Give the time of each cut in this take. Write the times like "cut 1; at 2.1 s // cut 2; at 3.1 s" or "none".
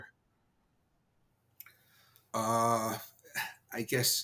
cut 1; at 2.3 s